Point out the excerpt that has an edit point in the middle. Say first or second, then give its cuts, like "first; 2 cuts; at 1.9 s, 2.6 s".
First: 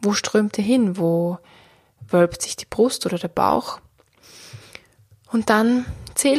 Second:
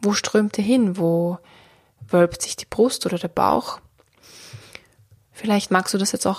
second; 1 cut; at 5.2 s